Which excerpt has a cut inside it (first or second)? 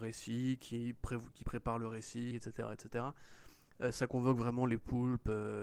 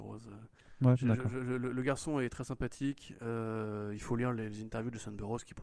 first